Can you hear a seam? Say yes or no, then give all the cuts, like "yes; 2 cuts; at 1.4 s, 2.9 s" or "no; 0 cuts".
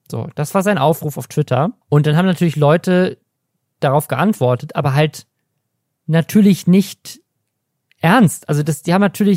yes; 1 cut; at 1.8 s